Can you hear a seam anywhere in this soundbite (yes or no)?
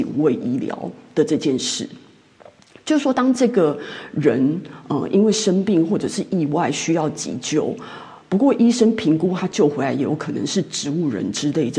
no